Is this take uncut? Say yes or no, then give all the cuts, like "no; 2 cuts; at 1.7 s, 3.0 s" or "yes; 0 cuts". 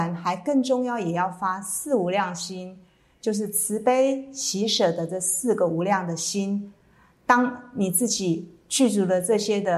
yes; 0 cuts